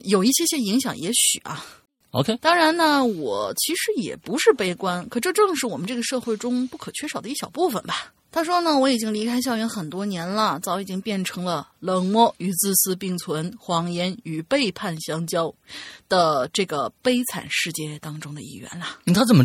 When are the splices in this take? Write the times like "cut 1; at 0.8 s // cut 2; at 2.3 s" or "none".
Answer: cut 1; at 8.2 s